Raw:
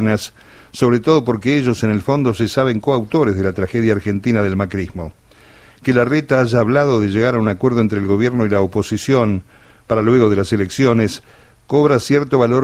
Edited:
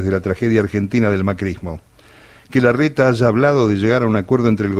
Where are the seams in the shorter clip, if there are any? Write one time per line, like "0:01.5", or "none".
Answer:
none